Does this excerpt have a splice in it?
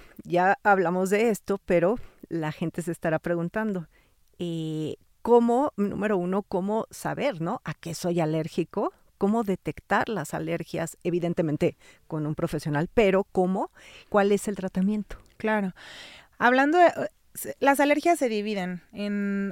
yes; 1 cut; at 14.0 s

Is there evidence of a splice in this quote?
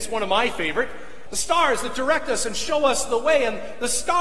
yes; 1 cut; at 1.3 s

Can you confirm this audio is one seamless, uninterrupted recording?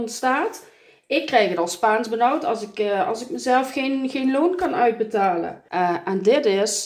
yes; 0 cuts

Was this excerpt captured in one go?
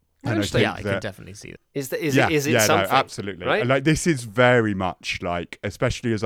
no; 1 cut; at 1.6 s

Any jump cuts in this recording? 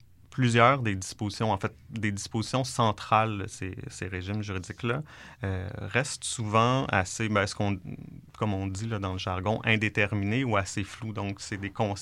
no; 0 cuts

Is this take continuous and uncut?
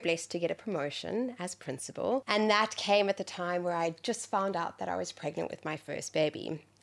yes; 0 cuts

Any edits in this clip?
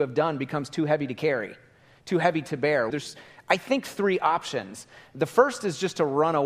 yes; 1 cut; at 2.9 s

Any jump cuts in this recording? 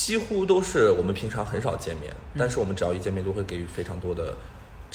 no; 0 cuts

